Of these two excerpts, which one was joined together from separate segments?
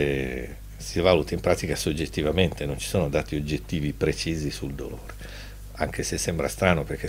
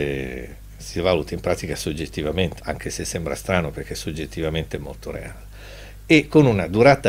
second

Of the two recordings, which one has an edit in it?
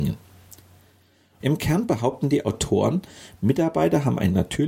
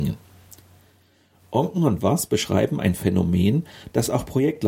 first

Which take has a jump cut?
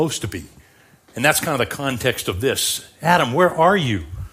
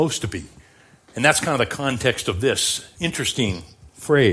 second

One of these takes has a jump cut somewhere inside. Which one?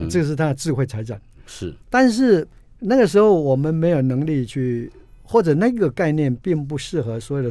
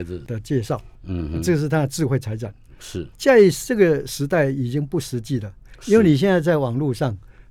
second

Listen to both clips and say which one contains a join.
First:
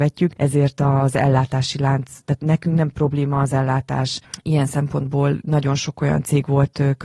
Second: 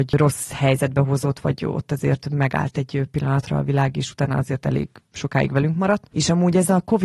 second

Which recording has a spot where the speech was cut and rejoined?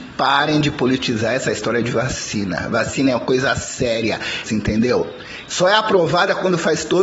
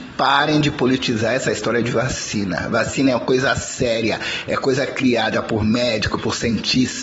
first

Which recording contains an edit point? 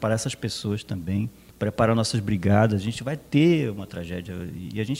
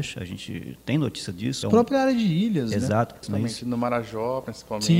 second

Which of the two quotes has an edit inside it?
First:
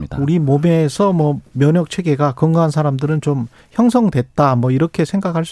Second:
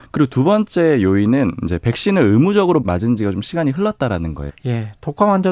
second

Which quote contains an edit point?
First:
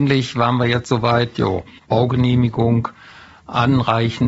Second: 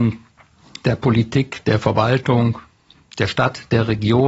first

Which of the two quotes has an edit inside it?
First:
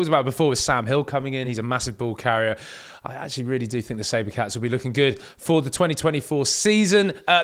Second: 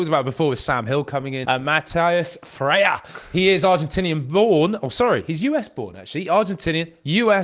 second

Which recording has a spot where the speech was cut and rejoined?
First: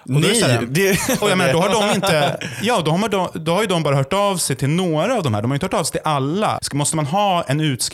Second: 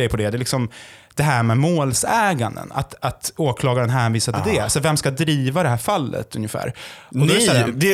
first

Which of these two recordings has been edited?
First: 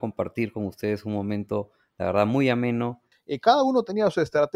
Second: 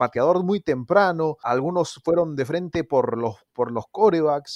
first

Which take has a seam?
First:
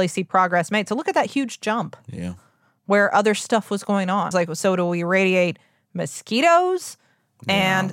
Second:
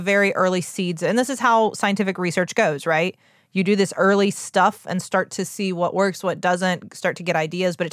first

